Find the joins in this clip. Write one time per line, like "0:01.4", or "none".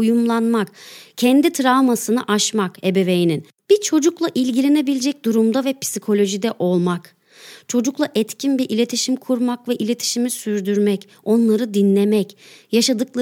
0:03.5